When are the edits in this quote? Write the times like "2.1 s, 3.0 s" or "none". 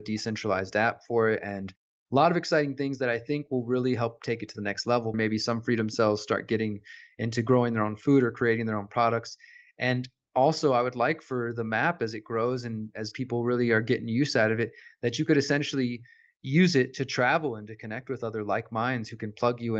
5.1 s